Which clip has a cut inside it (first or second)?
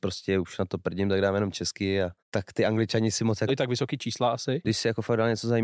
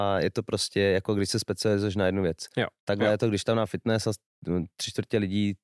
first